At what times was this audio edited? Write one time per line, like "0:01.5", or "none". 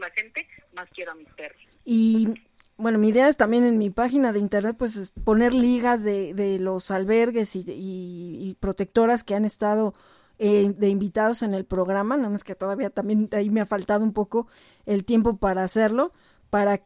0:01.6